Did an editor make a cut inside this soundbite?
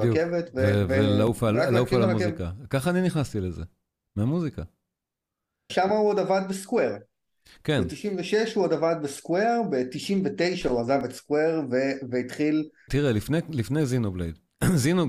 yes; 2 cuts; at 5.7 s, 12.9 s

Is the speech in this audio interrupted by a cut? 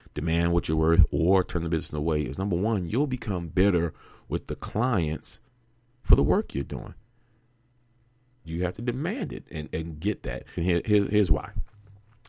yes; 2 cuts; at 8.4 s, 10.5 s

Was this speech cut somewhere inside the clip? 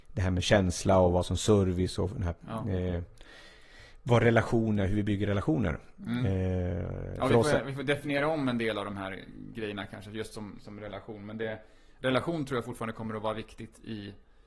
no; 0 cuts

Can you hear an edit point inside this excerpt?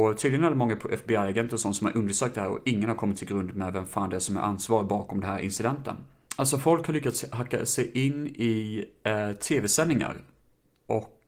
yes; 1 cut; at 6.3 s

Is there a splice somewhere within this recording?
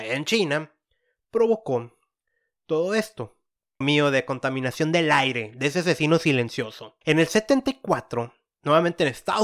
yes; 2 cuts; at 3.8 s, 7.0 s

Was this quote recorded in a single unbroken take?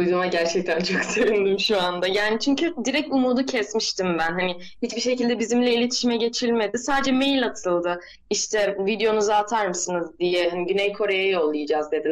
yes; 0 cuts

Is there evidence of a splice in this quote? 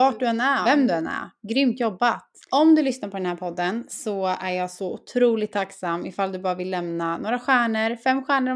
yes; 1 cut; at 2.4 s

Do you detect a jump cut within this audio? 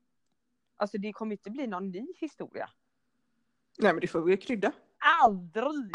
yes; 1 cut; at 4.9 s

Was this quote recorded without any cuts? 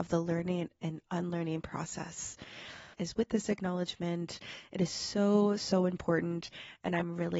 no; 1 cut; at 2.9 s

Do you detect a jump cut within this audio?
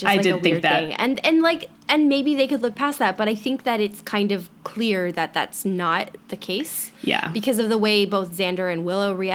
no; 0 cuts

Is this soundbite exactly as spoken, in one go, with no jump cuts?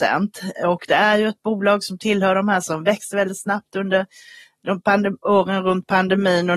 yes; 0 cuts

